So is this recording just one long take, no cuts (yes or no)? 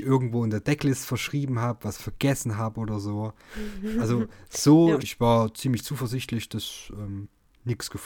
no